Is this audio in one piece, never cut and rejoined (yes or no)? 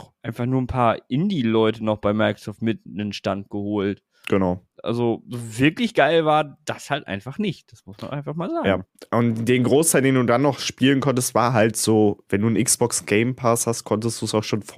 no